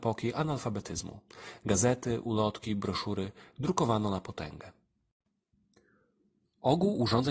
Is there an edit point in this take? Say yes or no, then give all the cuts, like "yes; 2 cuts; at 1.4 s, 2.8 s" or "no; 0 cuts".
no; 0 cuts